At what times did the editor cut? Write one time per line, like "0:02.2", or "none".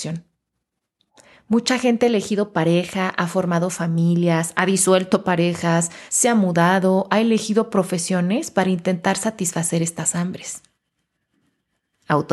none